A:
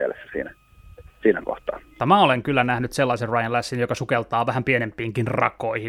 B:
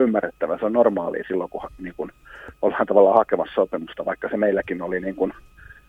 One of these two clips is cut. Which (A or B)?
A